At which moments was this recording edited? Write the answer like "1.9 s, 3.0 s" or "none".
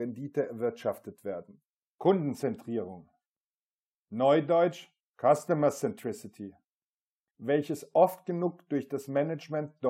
1.9 s, 7.3 s